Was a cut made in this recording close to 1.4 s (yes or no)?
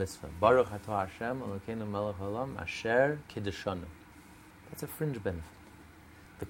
no